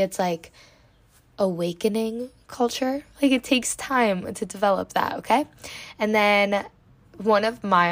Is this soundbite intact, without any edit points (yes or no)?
no